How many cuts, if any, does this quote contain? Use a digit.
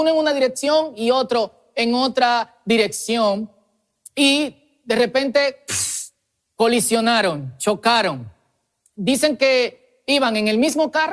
0